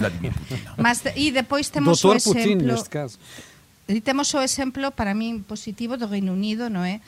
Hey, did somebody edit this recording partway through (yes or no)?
no